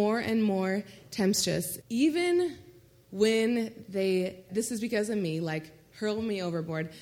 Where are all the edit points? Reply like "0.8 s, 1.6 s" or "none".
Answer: 1.8 s, 4.5 s